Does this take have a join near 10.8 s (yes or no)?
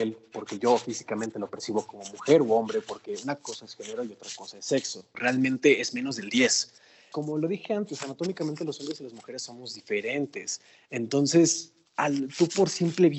no